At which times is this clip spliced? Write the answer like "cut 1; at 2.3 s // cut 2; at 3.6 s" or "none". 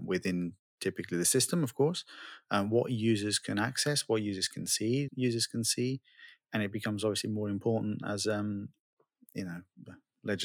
cut 1; at 5.1 s